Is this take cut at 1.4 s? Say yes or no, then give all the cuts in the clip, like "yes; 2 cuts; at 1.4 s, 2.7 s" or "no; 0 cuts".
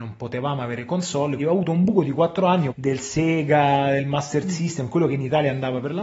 yes; 2 cuts; at 1.4 s, 2.7 s